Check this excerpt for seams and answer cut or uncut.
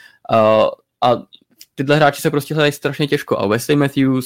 uncut